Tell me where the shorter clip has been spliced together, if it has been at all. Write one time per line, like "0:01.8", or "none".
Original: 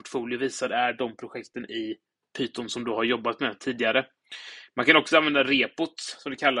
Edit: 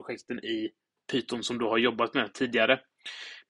none